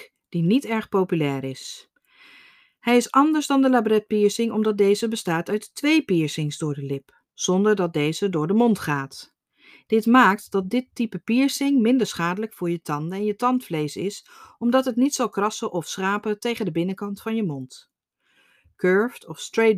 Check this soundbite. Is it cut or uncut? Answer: cut